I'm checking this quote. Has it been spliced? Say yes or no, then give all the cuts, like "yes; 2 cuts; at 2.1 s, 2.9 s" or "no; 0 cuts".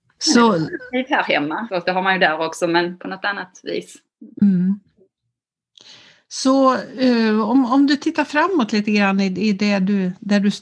yes; 1 cut; at 1.7 s